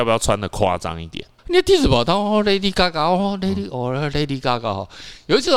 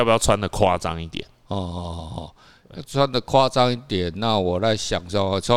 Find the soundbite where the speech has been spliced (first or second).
first